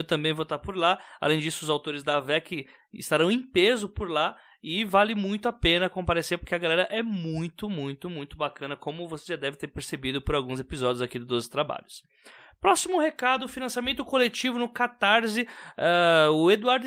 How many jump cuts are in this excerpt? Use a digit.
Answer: 0